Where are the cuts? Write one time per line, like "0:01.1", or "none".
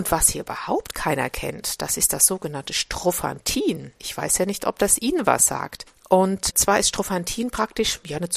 none